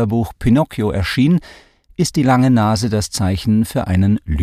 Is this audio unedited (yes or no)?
yes